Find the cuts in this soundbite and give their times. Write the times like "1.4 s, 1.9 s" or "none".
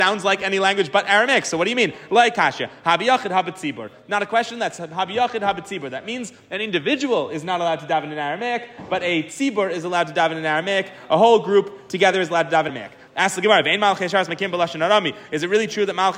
12.7 s